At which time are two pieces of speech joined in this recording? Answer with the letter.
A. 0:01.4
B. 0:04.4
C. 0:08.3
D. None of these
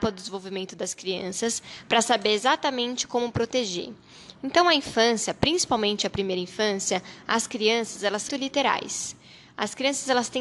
C